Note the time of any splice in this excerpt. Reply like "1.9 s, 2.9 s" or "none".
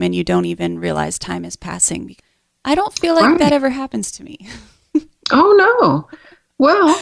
none

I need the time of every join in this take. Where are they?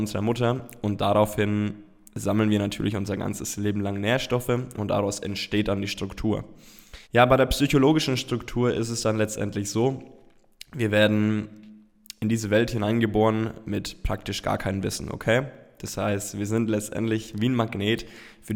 7.0 s

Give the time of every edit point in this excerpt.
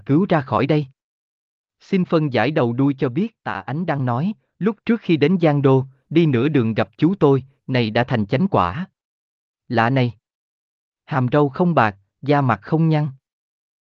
7.6 s, 9.5 s

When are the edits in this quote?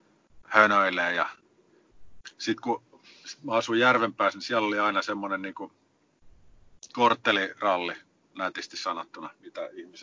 none

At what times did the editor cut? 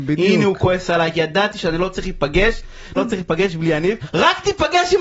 3.0 s, 4.0 s

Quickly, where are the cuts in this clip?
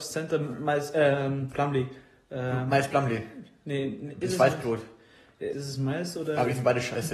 5.5 s

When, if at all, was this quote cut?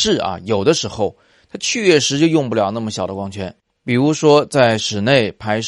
none

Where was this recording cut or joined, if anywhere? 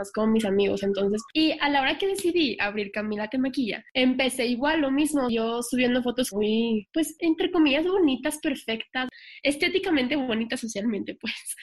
none

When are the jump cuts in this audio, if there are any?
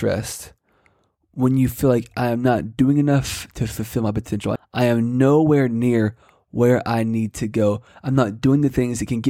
4.6 s

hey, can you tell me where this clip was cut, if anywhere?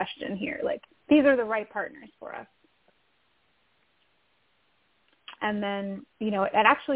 5.4 s

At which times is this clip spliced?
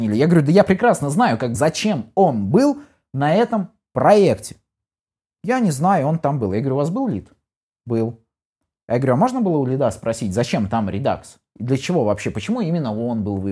1.5 s

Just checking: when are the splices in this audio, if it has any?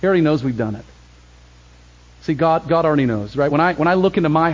none

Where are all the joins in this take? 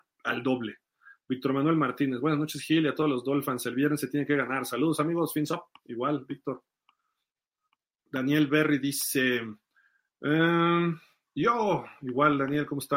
none

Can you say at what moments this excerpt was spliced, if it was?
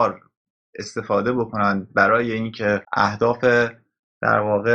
2.8 s

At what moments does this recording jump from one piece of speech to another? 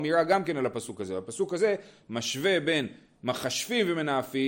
none

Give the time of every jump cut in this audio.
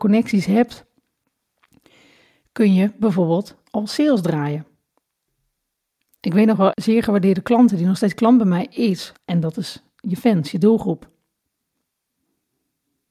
6.7 s, 9.1 s

